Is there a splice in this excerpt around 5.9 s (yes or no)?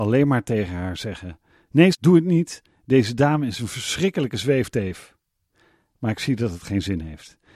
no